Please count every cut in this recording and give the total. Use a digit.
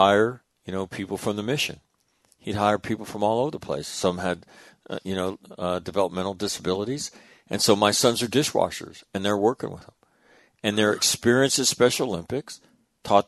0